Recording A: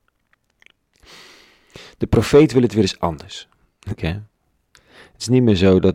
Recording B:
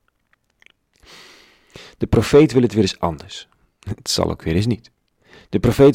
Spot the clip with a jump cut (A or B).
A